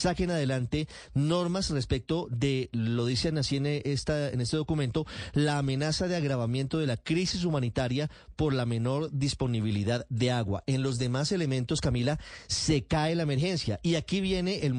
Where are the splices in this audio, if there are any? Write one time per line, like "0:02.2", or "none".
none